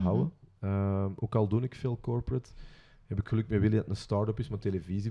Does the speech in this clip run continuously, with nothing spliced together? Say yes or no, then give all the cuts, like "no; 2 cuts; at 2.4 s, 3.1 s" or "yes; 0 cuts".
yes; 0 cuts